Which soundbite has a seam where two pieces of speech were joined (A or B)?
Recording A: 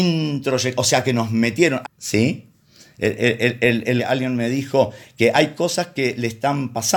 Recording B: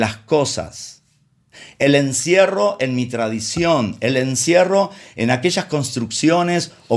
A